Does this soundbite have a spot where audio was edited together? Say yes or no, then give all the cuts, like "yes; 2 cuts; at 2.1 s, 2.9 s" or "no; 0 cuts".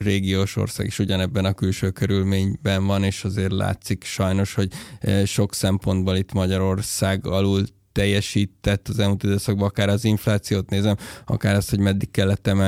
no; 0 cuts